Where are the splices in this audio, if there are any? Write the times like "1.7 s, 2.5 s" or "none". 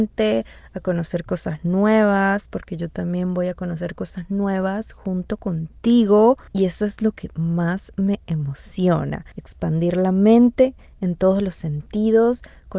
none